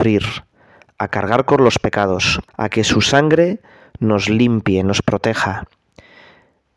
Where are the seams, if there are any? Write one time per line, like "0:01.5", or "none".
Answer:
0:02.5